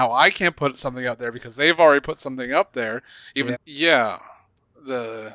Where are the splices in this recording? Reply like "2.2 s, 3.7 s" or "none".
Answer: 3.5 s